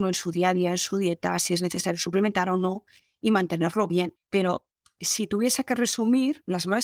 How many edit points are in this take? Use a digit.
1